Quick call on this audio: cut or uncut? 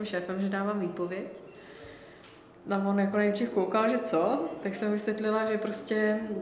uncut